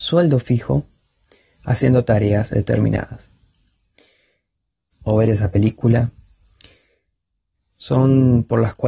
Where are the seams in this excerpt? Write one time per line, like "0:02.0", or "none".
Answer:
0:04.9
0:07.5